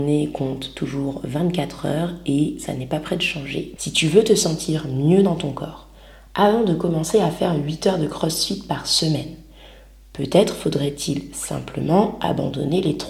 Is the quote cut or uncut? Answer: cut